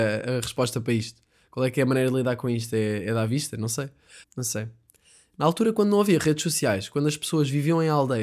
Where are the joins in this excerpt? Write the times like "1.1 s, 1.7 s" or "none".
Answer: 4.2 s